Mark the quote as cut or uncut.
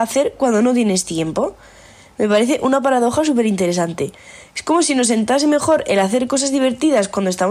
uncut